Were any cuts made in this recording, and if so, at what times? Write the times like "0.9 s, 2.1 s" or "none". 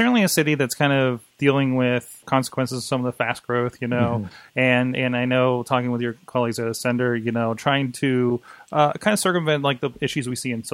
2.2 s